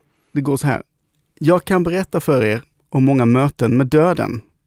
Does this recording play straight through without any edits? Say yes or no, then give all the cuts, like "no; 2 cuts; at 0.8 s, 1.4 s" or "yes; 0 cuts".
yes; 0 cuts